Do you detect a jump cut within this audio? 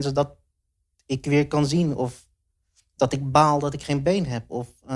no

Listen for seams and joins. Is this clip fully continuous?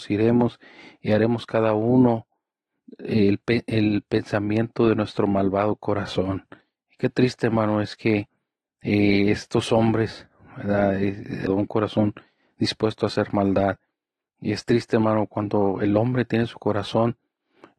no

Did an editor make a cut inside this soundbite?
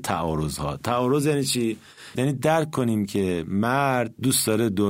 yes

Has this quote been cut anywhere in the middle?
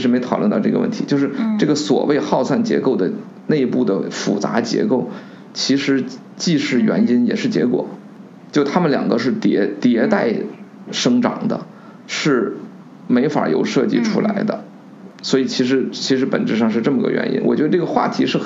no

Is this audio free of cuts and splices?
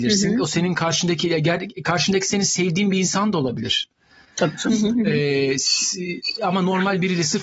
yes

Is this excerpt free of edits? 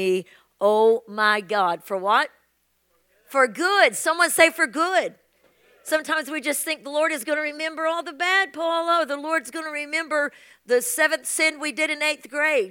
yes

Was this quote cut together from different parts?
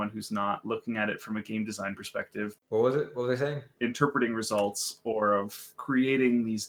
yes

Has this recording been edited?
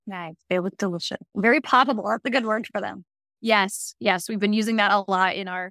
no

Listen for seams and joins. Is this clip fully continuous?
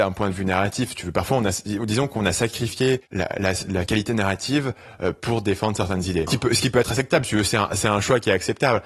no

